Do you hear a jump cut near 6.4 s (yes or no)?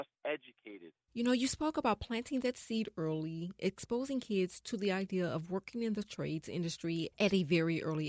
no